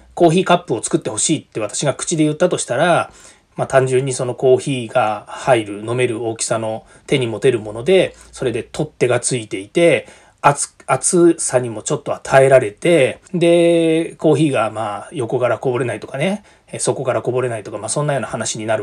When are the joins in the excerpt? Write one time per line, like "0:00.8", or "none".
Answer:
0:13.3